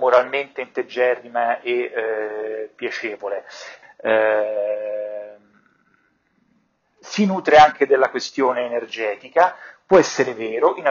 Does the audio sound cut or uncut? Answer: cut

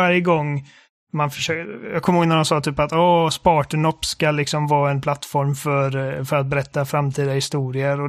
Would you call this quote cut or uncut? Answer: uncut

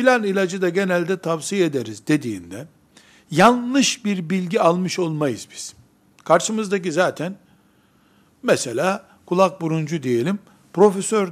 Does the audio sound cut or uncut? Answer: uncut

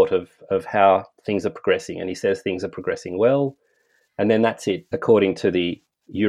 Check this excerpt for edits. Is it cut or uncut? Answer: cut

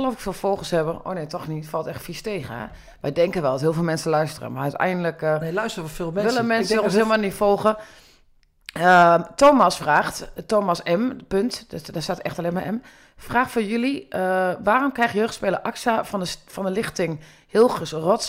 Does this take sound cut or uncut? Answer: uncut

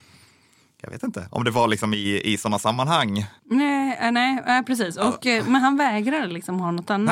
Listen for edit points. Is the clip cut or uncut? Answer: cut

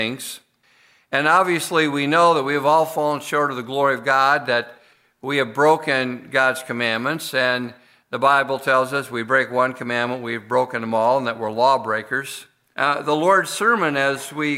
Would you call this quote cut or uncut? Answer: cut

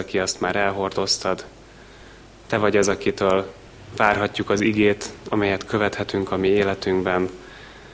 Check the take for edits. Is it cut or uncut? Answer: uncut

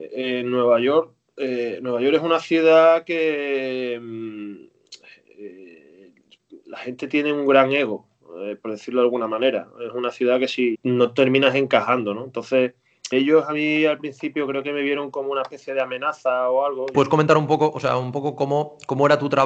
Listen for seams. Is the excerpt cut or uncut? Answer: cut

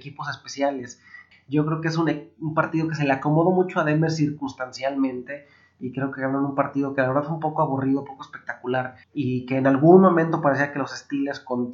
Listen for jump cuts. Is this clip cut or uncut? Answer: cut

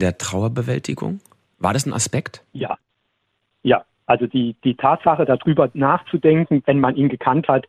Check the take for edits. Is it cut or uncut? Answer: cut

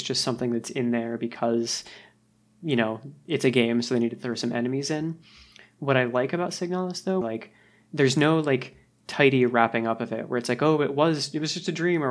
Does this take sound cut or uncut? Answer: cut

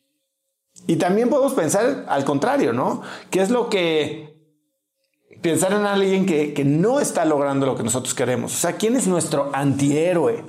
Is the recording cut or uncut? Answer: uncut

